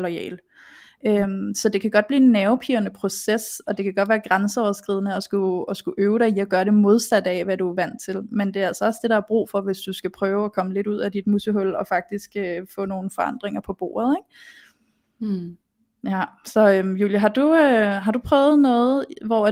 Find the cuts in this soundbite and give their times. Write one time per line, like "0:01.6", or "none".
none